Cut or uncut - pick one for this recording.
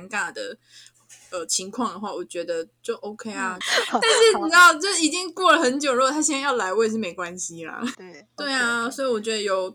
cut